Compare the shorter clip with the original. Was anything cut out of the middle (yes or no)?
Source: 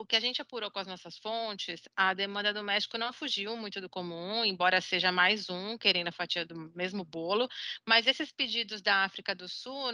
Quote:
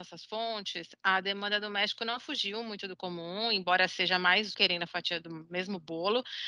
yes